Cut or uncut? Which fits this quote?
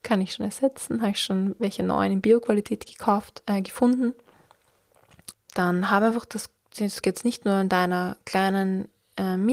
cut